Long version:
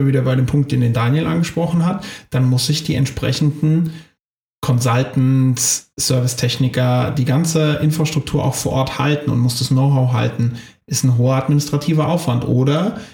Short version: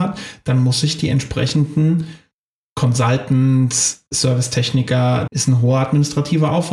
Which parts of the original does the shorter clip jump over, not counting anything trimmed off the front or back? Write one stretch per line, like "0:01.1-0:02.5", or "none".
0:07.1-0:10.8